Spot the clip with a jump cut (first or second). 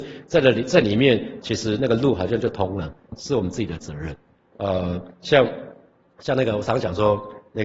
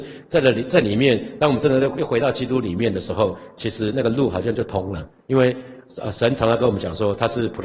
first